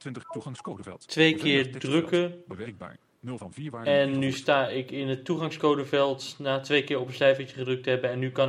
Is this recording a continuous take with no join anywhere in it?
yes; 0 cuts

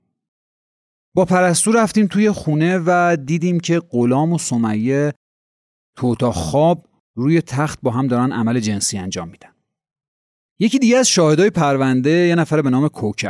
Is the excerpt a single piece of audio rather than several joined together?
yes; 0 cuts

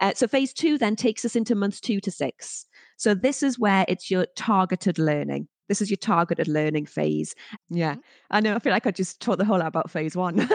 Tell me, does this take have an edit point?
yes; 1 cut; at 7.6 s

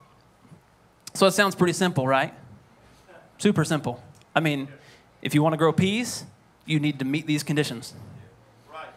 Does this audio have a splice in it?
no; 0 cuts

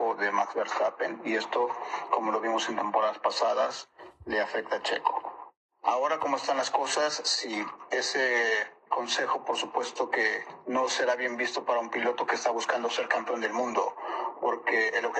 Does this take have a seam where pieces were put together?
no; 0 cuts

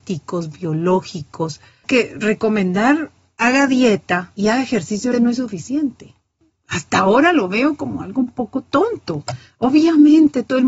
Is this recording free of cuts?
no; 1 cut; at 5.1 s

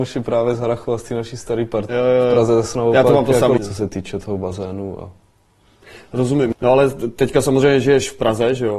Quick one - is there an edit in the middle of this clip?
yes; 2 cuts; at 1.9 s, 3.6 s

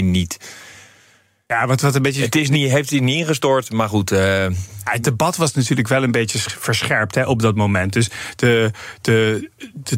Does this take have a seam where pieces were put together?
no; 0 cuts

